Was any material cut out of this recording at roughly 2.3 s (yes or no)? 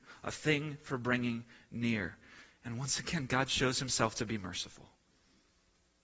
no